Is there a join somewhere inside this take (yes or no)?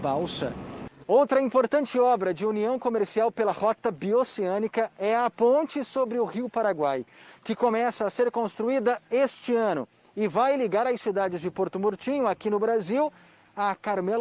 yes